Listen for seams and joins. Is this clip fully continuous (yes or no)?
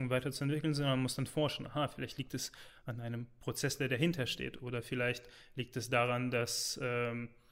yes